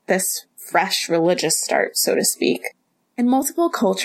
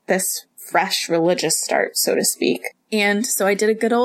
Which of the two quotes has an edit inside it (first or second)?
second